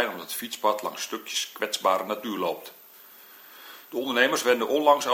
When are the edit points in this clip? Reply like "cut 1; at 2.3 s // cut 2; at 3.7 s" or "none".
none